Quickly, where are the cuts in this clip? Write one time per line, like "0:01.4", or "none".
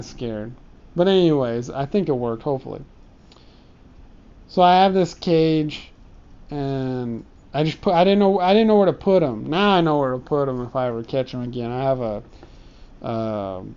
none